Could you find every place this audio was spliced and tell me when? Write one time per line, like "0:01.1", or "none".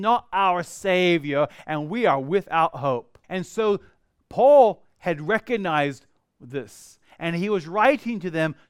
0:03.2

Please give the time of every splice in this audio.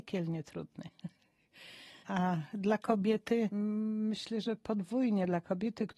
0:02.0

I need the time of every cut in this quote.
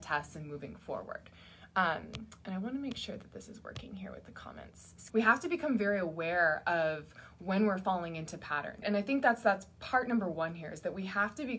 0:05.1
0:08.8

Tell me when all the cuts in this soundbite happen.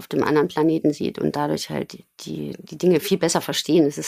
none

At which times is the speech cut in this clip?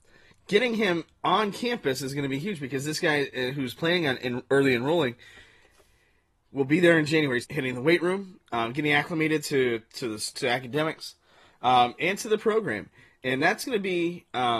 0:07.4
0:10.3

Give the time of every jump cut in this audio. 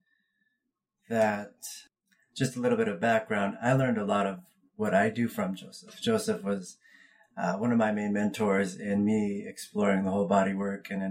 none

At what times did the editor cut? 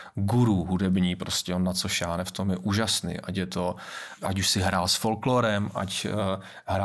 0:04.2

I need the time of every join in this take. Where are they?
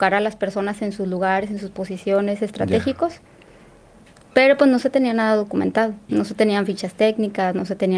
0:06.1

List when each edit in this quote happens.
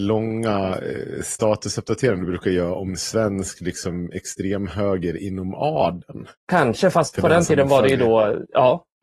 0:06.4

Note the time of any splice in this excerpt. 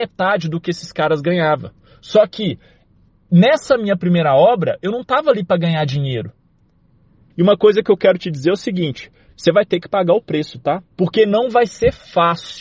0:07.3
0:10.9

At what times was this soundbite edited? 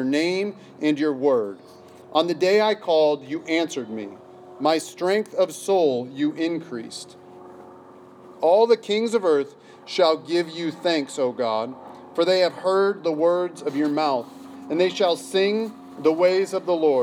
none

